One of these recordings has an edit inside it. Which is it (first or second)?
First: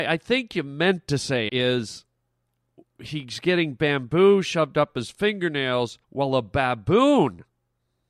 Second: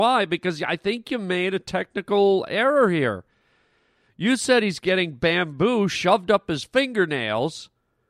first